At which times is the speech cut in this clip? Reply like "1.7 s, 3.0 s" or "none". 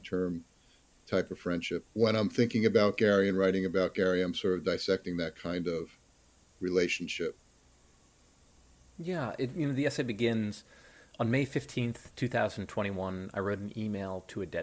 1.8 s